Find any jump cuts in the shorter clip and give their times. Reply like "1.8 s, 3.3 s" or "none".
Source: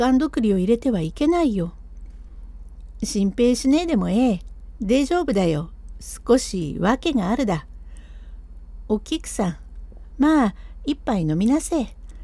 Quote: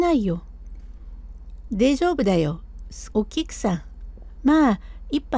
1.7 s, 3.1 s